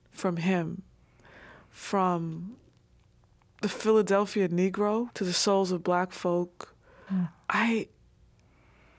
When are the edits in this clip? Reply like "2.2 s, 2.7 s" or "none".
5.1 s, 7.1 s

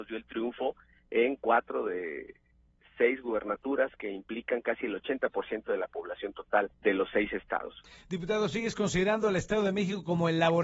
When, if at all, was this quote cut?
6.7 s

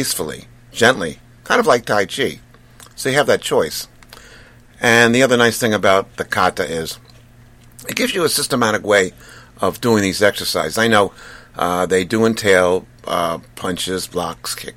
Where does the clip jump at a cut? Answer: none

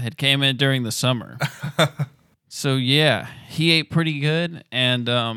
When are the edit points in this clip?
none

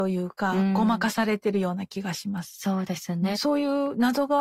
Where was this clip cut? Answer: 3.3 s

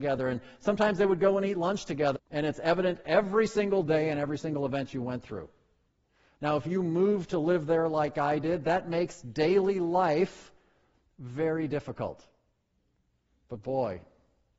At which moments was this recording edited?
2.2 s

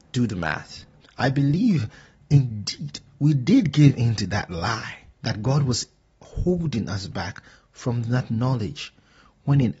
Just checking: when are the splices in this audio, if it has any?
1.0 s, 5.1 s

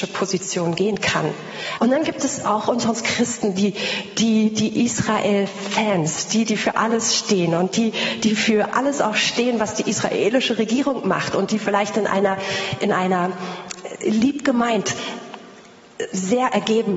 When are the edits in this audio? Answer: 1.8 s

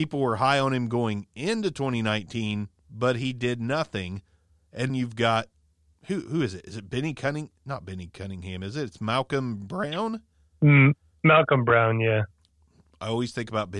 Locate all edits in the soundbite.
4.9 s

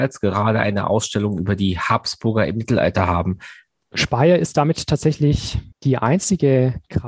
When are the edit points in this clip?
3.7 s, 5.7 s

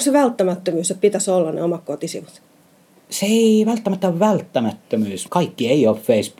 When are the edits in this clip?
5.3 s

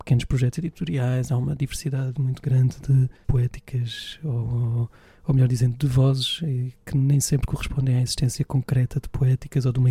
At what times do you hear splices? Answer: none

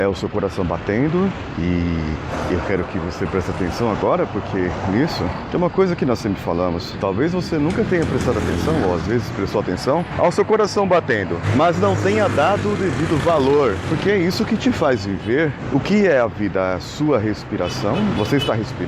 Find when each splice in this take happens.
none

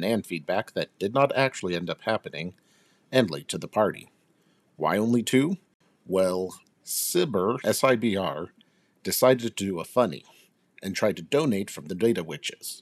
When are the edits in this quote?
7.6 s

